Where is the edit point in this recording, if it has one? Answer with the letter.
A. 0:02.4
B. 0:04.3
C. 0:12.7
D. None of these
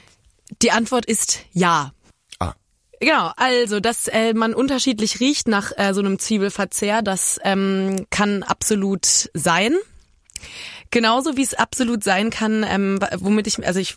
D